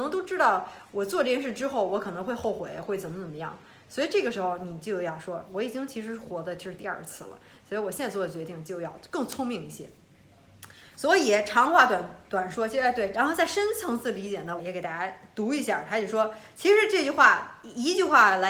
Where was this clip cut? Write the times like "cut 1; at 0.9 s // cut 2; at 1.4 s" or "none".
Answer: cut 1; at 13.1 s // cut 2; at 14.6 s